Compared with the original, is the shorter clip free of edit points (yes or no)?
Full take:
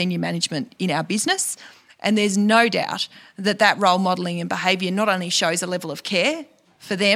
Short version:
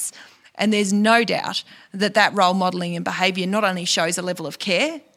yes